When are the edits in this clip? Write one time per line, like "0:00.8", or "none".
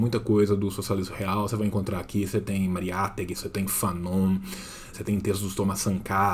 0:03.3
0:04.9